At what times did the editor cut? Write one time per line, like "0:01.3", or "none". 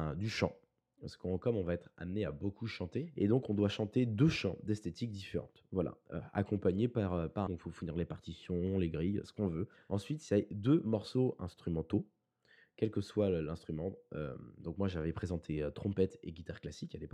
0:07.5